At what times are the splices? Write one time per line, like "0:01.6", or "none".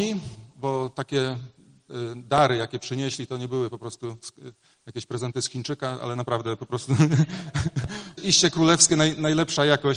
0:08.2